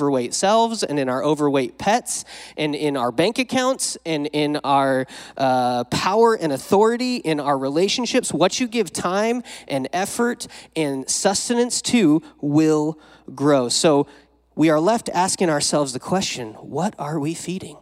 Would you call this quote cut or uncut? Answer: uncut